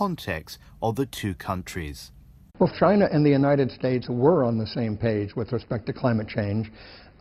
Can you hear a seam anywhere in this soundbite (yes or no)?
yes